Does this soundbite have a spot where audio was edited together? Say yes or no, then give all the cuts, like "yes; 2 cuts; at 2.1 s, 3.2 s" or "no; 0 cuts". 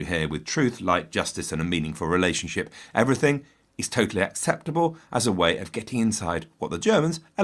no; 0 cuts